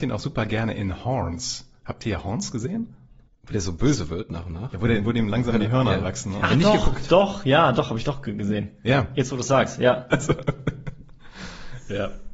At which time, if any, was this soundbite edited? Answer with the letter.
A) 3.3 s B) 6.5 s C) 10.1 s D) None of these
C